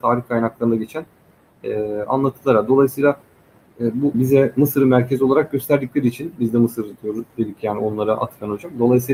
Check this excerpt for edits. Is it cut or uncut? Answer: cut